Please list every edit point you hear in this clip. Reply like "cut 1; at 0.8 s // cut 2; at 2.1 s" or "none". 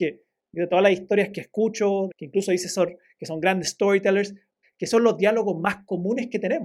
cut 1; at 2.1 s // cut 2; at 4.6 s